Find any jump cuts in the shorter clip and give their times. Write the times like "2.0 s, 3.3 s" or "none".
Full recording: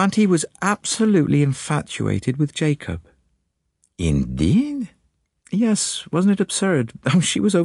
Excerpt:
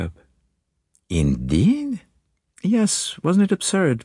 none